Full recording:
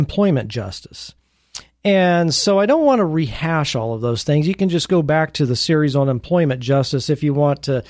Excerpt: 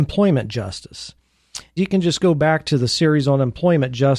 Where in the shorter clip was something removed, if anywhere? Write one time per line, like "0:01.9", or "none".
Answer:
0:01.8